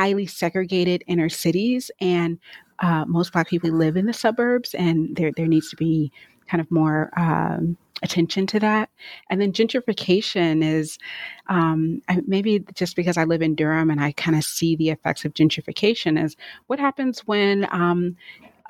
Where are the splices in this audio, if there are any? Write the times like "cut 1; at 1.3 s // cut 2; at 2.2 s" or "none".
cut 1; at 3.6 s